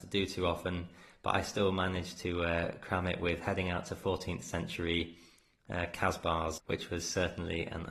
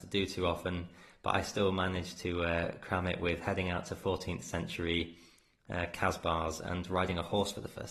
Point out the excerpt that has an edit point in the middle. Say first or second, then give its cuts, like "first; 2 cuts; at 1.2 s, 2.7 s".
first; 1 cut; at 6.6 s